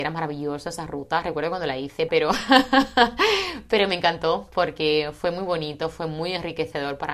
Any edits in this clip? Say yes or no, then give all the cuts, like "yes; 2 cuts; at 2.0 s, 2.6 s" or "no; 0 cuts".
yes; 1 cut; at 2.1 s